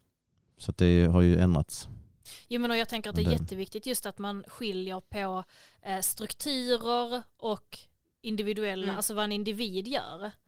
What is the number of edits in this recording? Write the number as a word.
zero